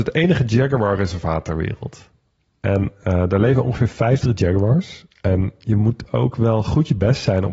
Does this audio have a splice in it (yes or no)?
no